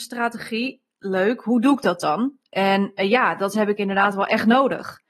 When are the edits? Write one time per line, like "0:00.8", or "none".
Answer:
none